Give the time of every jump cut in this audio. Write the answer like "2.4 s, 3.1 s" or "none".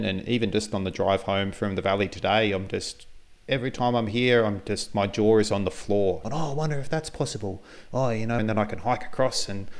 6.2 s, 8.4 s